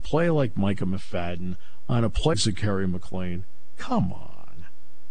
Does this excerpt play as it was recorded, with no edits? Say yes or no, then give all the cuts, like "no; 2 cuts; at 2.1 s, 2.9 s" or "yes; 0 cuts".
no; 1 cut; at 2.3 s